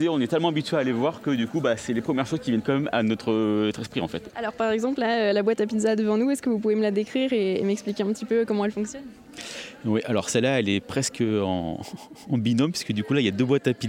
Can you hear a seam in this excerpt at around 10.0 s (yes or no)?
no